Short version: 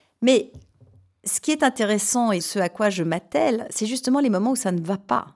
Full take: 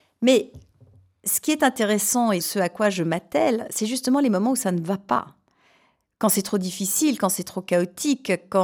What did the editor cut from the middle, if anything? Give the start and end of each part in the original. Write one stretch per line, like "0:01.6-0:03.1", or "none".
none